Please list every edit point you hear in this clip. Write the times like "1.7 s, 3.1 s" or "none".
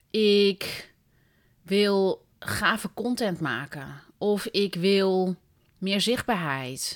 2.4 s